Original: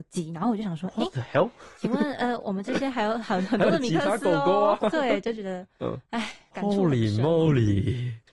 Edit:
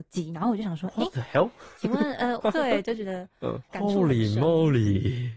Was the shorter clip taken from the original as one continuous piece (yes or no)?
no